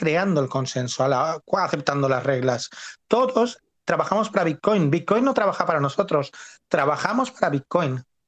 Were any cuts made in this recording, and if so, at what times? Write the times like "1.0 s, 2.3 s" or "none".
none